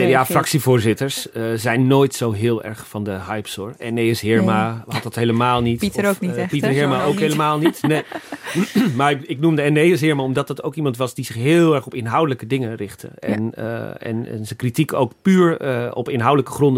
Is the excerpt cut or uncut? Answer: uncut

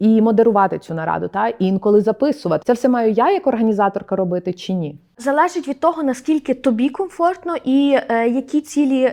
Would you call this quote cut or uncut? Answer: cut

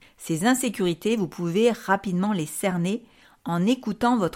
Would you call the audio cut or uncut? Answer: uncut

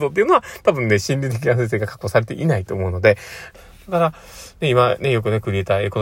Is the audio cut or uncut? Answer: cut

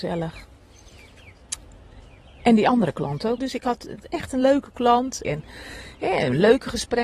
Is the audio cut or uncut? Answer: cut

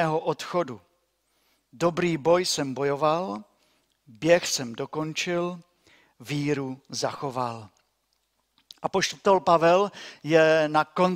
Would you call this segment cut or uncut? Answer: uncut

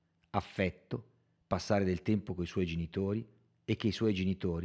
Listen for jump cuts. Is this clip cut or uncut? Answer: uncut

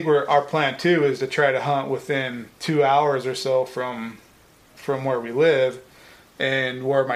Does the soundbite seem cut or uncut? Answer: cut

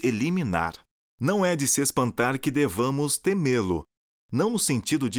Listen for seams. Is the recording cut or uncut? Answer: cut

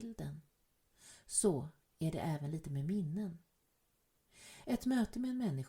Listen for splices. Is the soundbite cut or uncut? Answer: uncut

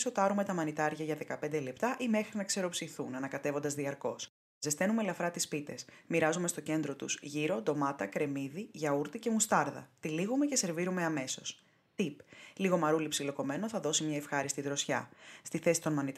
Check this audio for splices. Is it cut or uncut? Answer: uncut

